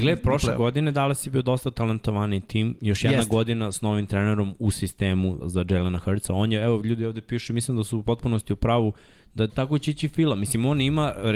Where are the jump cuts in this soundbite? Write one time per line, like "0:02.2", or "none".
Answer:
0:05.4
0:09.5